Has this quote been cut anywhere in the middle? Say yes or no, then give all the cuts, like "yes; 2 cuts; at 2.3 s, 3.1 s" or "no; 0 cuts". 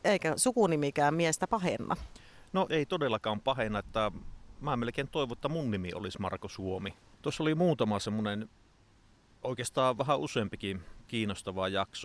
yes; 2 cuts; at 2.7 s, 7.1 s